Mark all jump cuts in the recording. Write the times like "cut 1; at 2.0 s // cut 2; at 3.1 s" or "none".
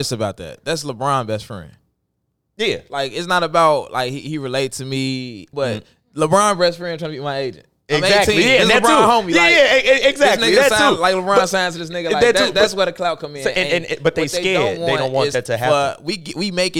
cut 1; at 5.5 s